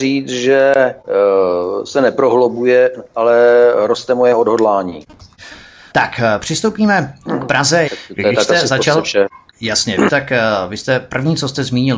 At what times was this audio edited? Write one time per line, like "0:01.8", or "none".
0:05.9
0:07.9
0:10.1